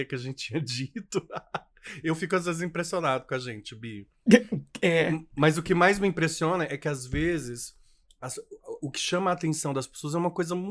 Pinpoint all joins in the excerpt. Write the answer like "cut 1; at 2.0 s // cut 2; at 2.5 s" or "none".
none